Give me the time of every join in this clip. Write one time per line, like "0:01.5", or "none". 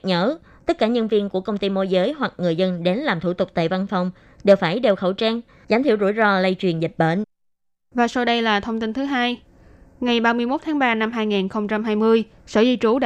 0:05.6

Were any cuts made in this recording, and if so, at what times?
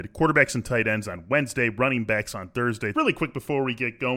0:02.9

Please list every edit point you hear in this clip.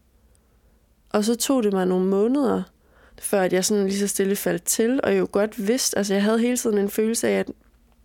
none

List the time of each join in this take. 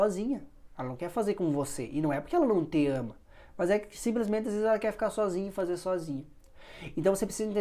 none

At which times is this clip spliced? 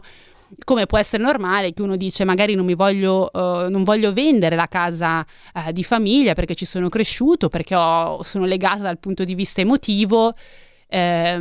none

